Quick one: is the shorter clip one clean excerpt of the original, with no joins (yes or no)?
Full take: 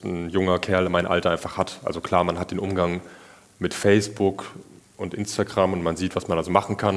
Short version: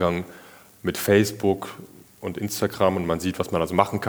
yes